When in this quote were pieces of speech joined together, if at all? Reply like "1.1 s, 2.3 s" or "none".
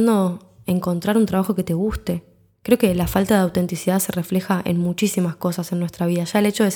none

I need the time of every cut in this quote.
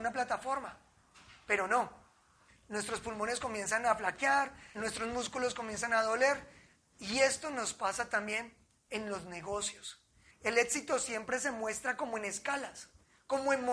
2.5 s, 4.7 s, 10.3 s

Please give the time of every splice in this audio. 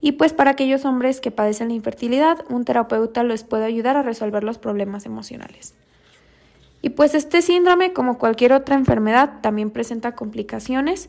none

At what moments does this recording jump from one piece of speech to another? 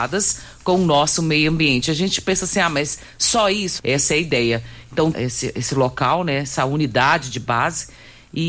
3.8 s, 5.1 s

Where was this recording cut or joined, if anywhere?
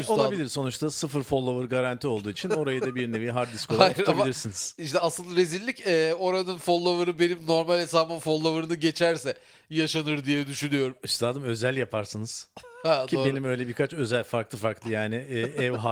none

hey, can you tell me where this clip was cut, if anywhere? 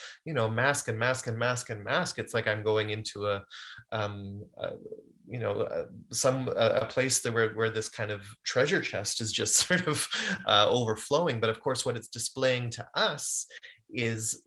none

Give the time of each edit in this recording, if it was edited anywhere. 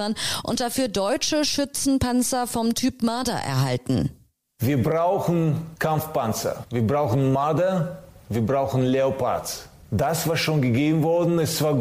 none

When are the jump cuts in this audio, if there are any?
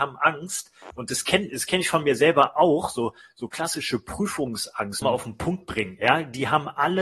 5.0 s

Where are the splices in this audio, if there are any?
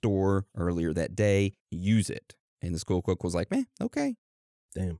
1.6 s

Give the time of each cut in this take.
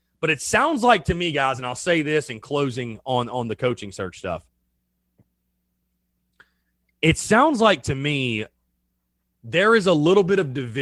none

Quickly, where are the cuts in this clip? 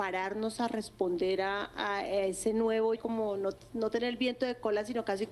3.0 s

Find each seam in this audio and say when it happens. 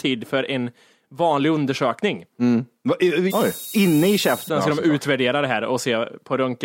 3.3 s, 4.5 s

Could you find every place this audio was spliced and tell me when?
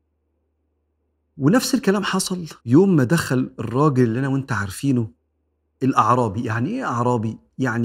2.6 s

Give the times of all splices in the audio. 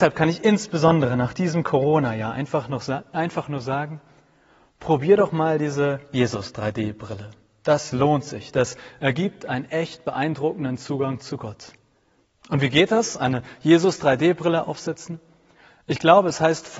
none

